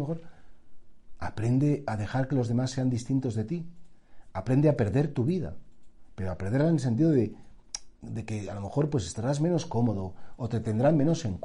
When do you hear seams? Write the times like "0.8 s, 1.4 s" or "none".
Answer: 1.2 s, 10.3 s

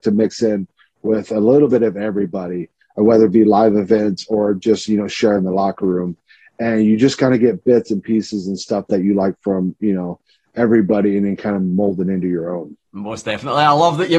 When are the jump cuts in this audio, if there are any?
12.8 s

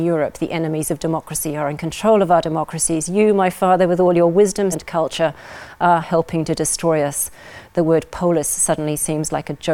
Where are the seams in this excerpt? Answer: 4.7 s, 6.0 s

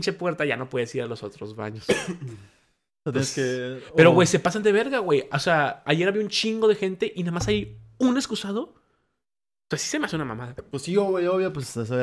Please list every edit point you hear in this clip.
none

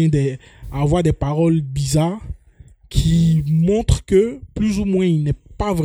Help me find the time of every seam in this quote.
none

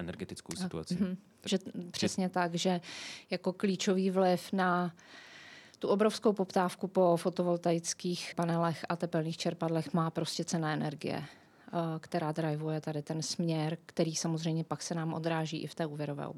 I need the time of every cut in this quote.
1.5 s, 8.3 s

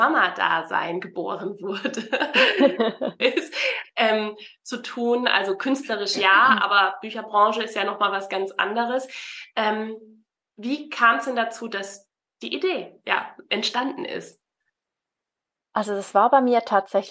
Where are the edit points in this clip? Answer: 3.2 s

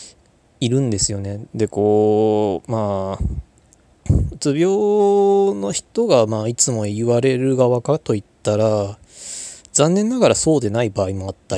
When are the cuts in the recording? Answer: 1.5 s

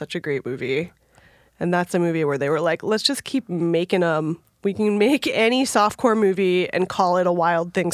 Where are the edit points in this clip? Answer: none

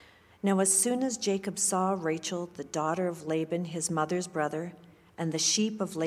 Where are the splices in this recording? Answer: none

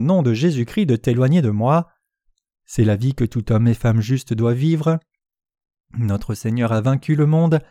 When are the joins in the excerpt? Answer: 2.5 s

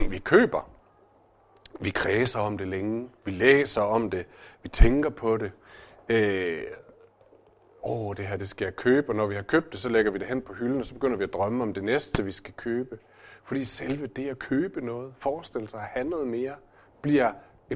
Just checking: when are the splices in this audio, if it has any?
none

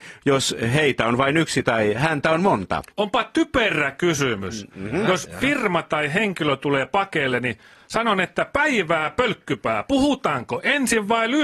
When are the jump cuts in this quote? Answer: 2.9 s

